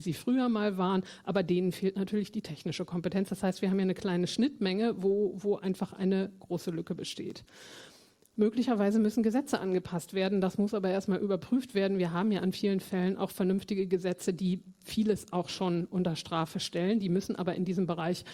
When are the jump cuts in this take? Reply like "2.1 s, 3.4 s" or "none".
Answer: none